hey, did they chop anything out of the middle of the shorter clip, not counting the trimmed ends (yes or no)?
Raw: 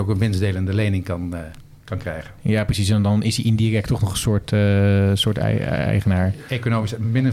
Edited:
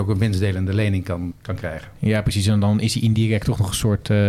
yes